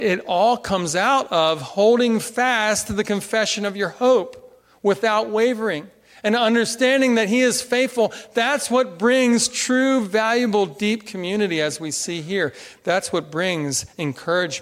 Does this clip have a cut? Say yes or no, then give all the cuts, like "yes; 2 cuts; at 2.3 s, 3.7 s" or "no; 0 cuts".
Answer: no; 0 cuts